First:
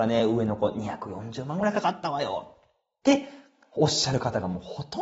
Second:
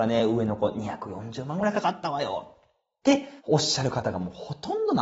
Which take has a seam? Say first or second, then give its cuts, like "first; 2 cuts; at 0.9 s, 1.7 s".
second; 1 cut; at 3.4 s